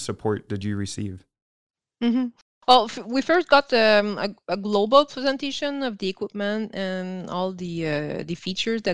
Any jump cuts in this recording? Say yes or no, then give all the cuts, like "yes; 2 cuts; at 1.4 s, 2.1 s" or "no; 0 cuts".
no; 0 cuts